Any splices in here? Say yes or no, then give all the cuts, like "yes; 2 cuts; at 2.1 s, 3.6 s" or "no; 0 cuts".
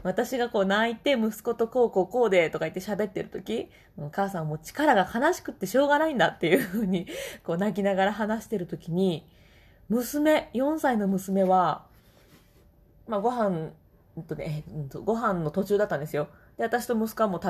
no; 0 cuts